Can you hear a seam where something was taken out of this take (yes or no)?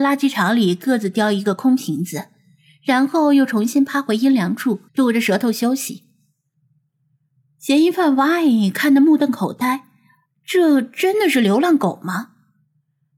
yes